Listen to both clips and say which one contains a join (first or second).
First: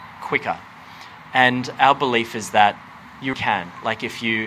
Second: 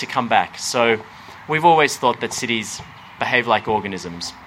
first